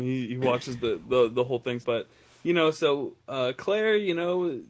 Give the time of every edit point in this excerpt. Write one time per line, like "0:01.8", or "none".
0:01.8